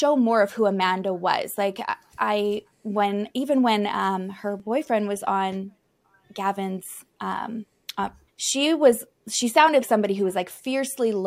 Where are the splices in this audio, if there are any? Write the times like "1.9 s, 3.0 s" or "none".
8.3 s, 9.8 s